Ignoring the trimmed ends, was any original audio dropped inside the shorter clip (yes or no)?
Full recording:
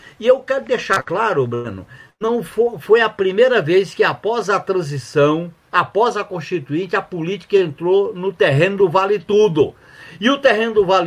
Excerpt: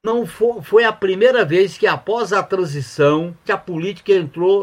yes